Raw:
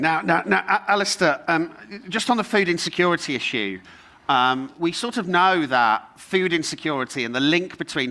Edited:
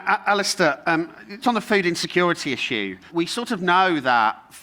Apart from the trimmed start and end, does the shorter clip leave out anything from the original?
yes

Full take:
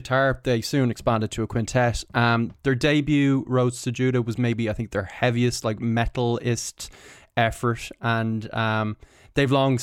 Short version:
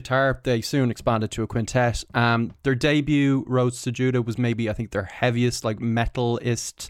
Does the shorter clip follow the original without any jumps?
yes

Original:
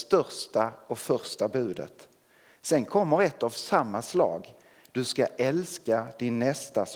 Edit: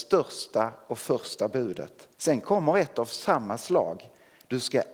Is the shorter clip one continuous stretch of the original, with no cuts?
no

